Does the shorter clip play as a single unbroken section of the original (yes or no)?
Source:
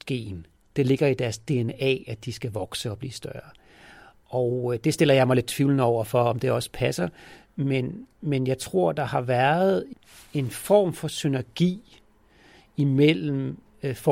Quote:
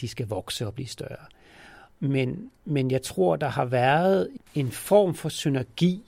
no